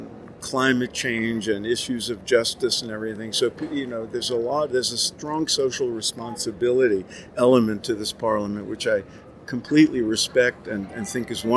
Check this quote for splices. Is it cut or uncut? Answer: uncut